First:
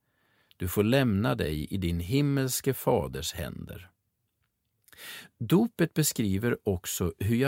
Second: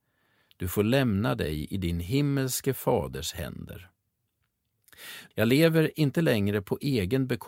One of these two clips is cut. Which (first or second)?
second